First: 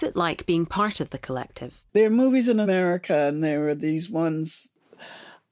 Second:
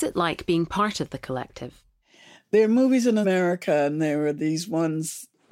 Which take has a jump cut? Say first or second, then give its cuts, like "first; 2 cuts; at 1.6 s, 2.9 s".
first; 1 cut; at 1.9 s